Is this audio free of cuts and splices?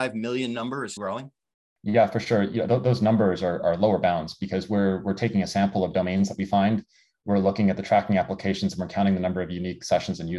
no; 1 cut; at 1.0 s

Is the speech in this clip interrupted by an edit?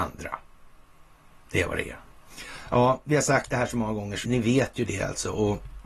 yes; 1 cut; at 4.2 s

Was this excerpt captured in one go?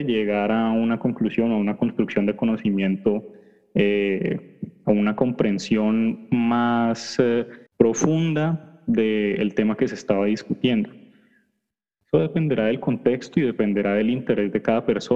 no; 1 cut; at 7.7 s

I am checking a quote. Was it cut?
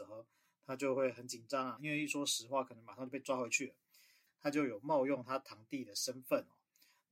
yes; 2 cuts; at 1.8 s, 4.3 s

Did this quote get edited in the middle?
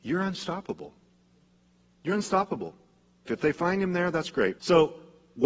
yes; 2 cuts; at 3.2 s, 4.6 s

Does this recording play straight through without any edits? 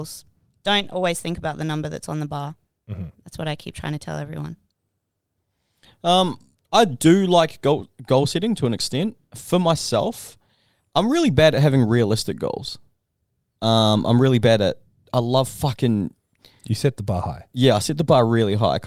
yes; 0 cuts

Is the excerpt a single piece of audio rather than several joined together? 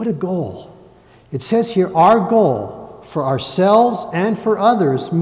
yes; 0 cuts

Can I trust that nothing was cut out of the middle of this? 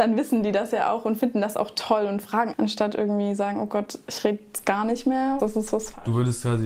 no; 2 cuts; at 2.5 s, 5.4 s

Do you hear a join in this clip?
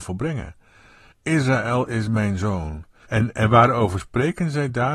yes; 2 cuts; at 1.1 s, 3.0 s

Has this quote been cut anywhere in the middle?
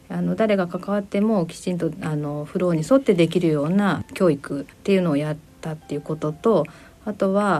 yes; 1 cut; at 4.7 s

